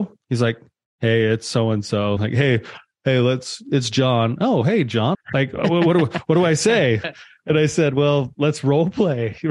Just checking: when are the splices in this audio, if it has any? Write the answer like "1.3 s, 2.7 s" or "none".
2.2 s, 5.1 s, 8.3 s